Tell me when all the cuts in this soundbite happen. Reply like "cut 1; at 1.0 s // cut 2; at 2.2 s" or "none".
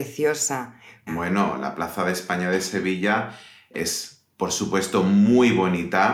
cut 1; at 1.1 s // cut 2; at 4.3 s